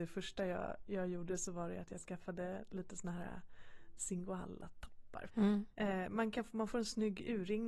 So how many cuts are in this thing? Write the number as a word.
one